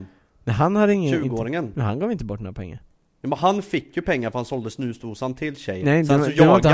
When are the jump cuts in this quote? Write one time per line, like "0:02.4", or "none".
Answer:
0:05.8